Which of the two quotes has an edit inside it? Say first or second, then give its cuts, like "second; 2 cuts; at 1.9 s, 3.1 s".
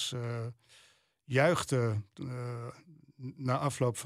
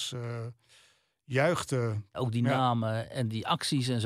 second; 1 cut; at 2.1 s